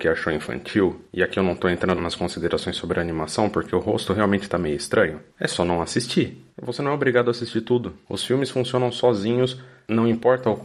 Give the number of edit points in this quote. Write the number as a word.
one